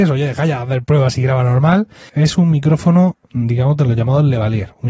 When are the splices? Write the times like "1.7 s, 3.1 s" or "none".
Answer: 2.1 s